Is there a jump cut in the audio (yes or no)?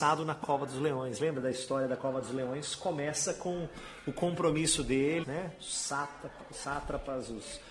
yes